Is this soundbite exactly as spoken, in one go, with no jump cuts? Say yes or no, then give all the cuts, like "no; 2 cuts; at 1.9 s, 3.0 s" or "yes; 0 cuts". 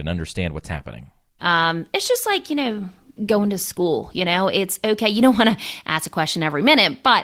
no; 2 cuts; at 1.4 s, 3.2 s